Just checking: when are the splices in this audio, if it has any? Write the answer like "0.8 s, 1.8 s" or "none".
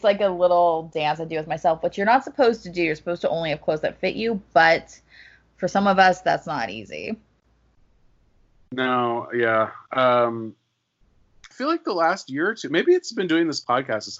11.5 s